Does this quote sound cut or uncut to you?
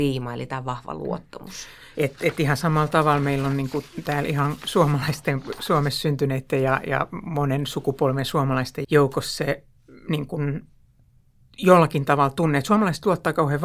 cut